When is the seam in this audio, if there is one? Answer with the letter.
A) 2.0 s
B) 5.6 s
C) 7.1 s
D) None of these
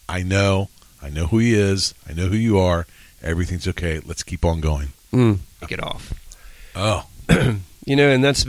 B